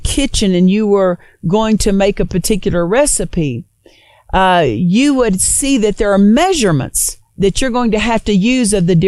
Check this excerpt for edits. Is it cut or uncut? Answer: uncut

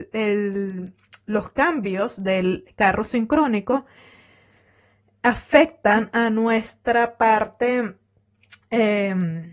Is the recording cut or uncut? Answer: uncut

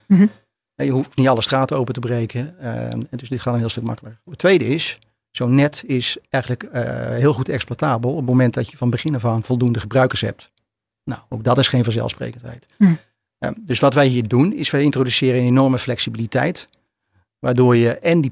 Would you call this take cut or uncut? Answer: cut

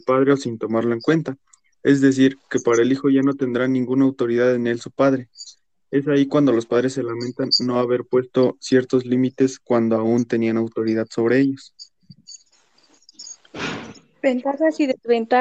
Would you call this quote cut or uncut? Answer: uncut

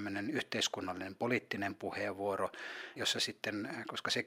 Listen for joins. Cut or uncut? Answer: cut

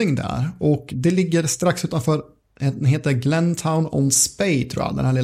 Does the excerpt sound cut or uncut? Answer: uncut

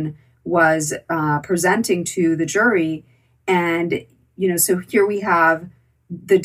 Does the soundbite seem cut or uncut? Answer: uncut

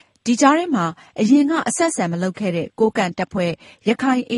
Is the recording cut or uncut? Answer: uncut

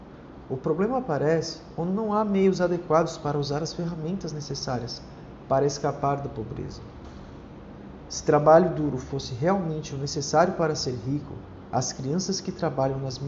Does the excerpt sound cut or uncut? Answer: uncut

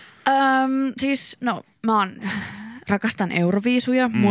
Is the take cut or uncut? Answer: uncut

